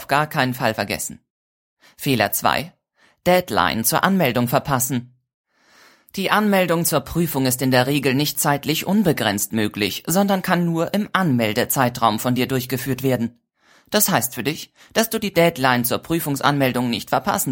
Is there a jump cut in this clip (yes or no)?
no